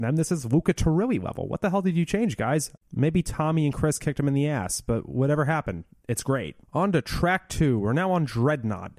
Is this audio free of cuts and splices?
no; 2 cuts; at 2.8 s, 6.6 s

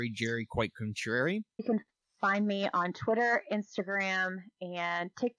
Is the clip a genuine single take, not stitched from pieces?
no; 1 cut; at 1.6 s

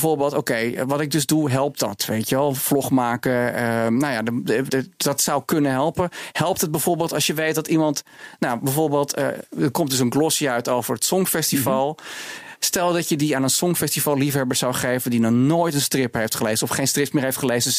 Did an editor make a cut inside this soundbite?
yes; 1 cut; at 4.7 s

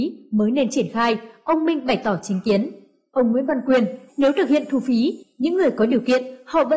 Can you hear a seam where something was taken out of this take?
yes; 1 cut; at 4.1 s

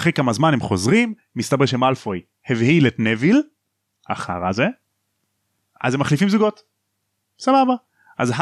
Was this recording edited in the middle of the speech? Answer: no; 0 cuts

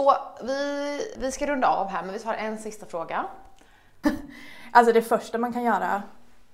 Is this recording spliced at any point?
yes; 2 cuts; at 1.2 s, 4.0 s

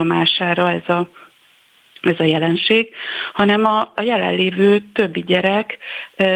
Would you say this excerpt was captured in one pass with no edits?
no; 1 cut; at 4.0 s

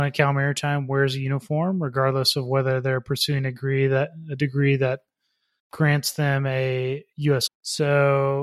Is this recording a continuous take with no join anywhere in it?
no; 1 cut; at 7.5 s

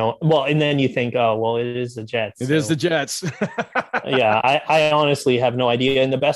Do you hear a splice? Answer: no; 0 cuts

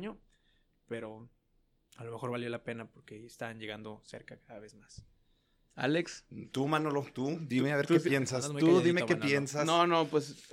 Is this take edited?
no; 0 cuts

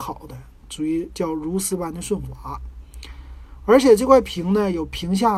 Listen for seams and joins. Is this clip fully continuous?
yes; 0 cuts

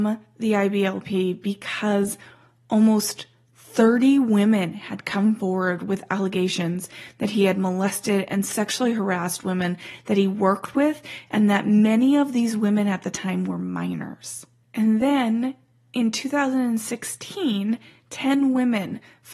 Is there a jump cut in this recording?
no; 0 cuts

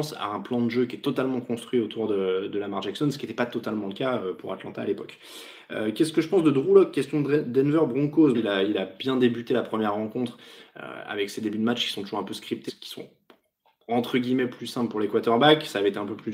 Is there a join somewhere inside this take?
yes; 2 cuts; at 8.3 s, 12.7 s

